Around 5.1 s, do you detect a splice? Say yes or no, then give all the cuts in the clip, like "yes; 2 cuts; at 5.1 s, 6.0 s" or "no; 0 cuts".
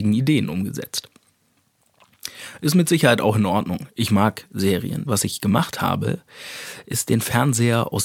yes; 1 cut; at 5.1 s